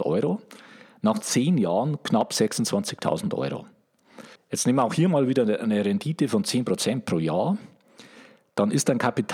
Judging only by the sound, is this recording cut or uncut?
cut